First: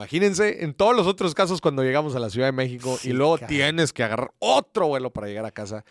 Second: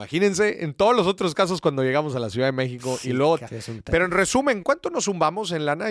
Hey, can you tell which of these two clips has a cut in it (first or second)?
second